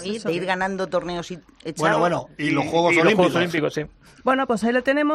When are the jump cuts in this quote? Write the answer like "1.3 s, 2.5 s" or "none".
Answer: 4.2 s

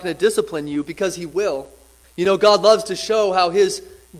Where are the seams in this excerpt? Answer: 2.0 s

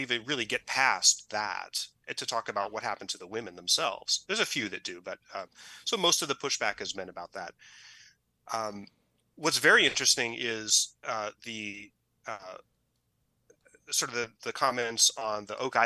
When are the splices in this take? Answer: 14.4 s

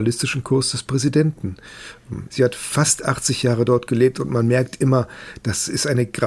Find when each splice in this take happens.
2.3 s

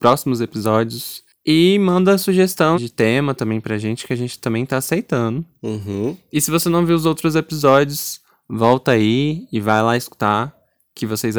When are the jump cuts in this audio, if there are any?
2.7 s

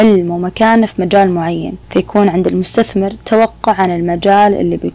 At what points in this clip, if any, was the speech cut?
1.8 s

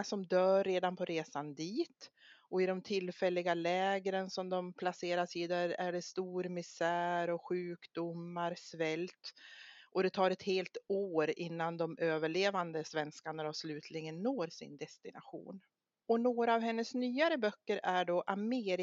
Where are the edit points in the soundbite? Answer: 16.0 s

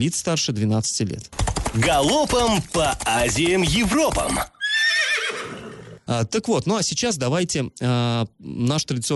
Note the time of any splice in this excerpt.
6.1 s

